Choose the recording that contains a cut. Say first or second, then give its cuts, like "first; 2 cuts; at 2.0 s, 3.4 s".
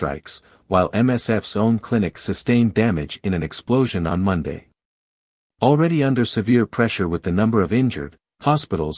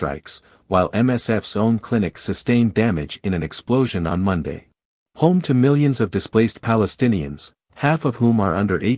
second; 1 cut; at 5.0 s